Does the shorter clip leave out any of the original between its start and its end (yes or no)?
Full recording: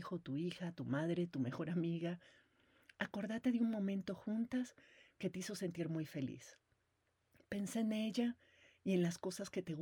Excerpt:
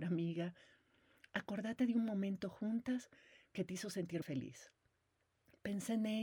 yes